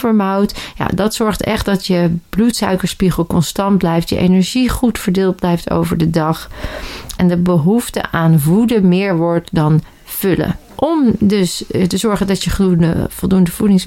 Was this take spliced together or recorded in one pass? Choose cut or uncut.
cut